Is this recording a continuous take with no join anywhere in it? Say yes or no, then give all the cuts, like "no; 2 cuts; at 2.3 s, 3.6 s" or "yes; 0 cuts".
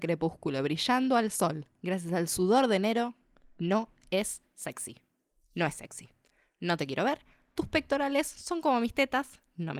yes; 0 cuts